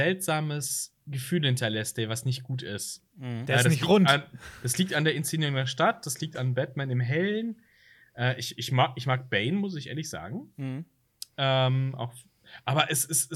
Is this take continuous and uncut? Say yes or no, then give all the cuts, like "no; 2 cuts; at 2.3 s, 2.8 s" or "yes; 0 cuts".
no; 1 cut; at 1.0 s